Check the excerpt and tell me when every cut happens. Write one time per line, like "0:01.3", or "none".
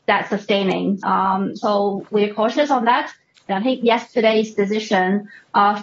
0:01.0
0:03.5